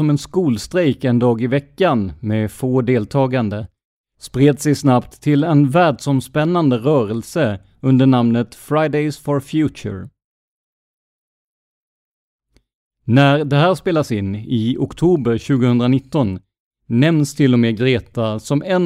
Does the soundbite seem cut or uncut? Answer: uncut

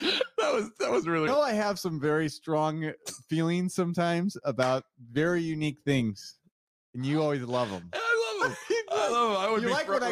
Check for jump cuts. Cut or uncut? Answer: cut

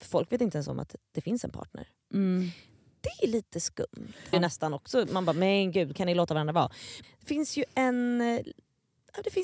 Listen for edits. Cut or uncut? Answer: cut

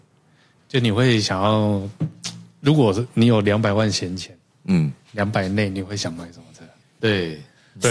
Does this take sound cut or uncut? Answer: cut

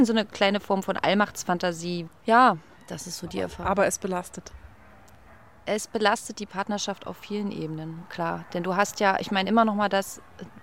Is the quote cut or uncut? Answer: cut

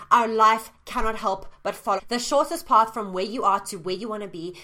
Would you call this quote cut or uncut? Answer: cut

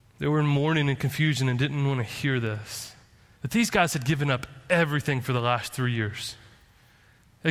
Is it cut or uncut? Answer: cut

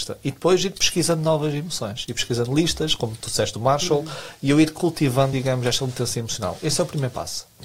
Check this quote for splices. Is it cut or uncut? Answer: uncut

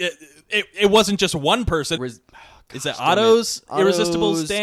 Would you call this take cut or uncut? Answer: cut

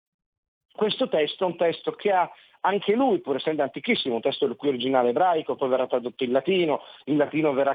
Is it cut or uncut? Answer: cut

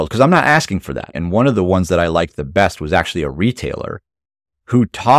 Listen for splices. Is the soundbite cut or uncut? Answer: cut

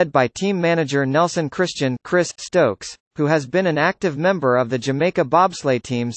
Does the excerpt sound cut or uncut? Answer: uncut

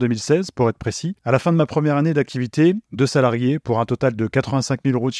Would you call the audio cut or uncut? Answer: cut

